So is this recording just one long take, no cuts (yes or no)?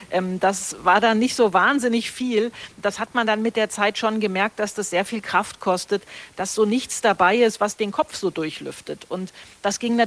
yes